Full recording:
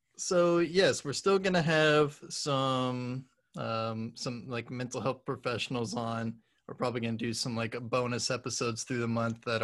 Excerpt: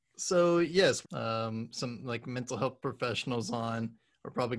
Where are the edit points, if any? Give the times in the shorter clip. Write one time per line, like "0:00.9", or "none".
0:01.0